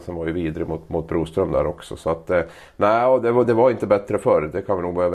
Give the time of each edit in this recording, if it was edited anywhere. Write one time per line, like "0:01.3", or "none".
0:03.4